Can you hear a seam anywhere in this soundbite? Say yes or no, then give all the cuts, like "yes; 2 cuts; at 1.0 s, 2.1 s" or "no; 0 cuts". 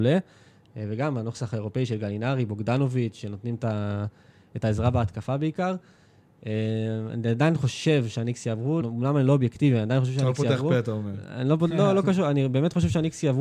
yes; 1 cut; at 8.8 s